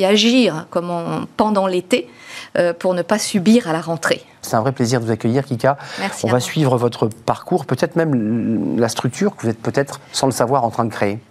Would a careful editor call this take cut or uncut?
cut